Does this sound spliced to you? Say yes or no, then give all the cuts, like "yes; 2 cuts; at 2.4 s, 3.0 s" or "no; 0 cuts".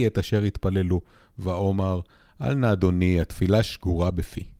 no; 0 cuts